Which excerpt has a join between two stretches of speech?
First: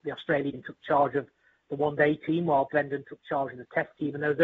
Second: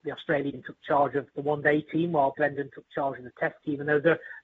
second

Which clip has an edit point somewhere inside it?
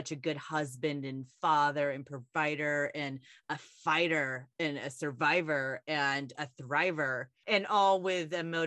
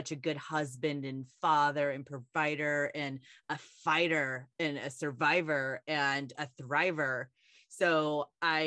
first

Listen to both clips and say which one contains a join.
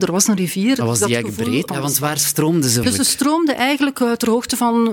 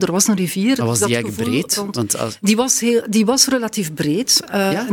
first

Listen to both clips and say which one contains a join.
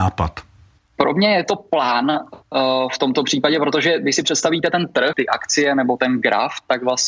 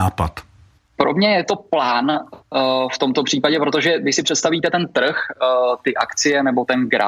first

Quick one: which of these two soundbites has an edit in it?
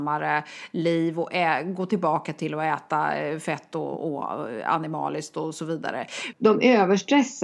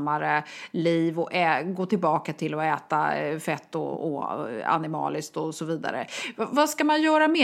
first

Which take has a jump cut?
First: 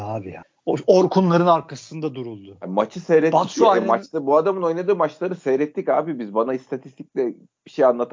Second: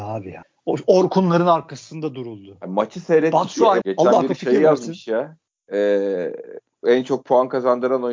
second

